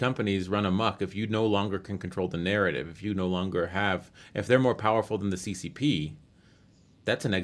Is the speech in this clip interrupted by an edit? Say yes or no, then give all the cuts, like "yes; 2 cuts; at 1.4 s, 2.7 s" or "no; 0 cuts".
no; 0 cuts